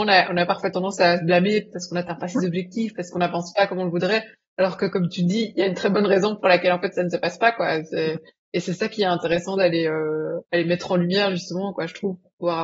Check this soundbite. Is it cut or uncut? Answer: uncut